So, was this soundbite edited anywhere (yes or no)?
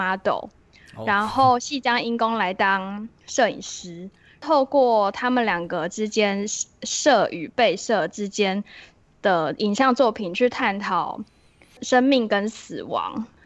no